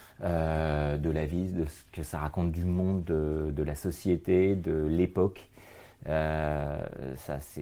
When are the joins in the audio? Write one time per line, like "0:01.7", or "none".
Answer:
none

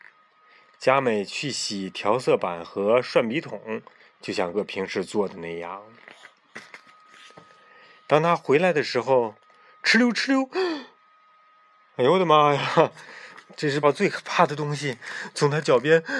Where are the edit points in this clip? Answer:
0:04.5
0:13.8

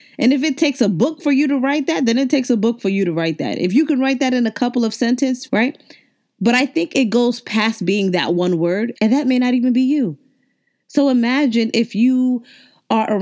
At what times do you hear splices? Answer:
0:05.5
0:08.9

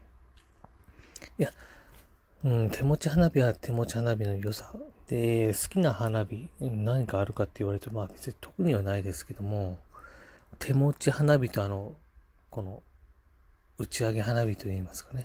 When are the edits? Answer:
0:04.9

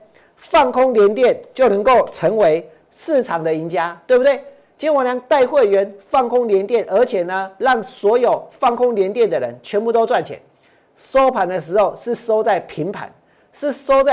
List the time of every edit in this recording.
none

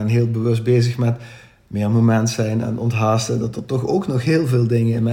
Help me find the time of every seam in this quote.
none

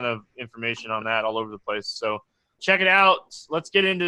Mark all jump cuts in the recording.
0:02.6

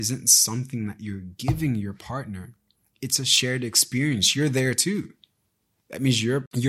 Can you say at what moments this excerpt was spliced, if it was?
none

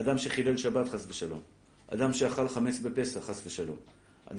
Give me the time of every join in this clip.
none

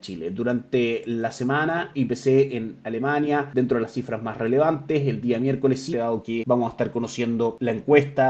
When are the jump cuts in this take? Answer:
0:01.9
0:05.9

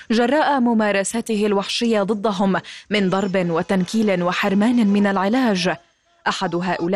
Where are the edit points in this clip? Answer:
none

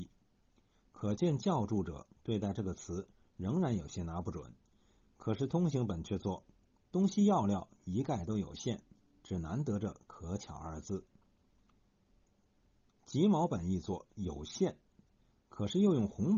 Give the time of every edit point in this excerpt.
none

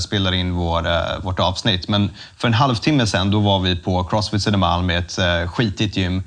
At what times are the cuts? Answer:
none

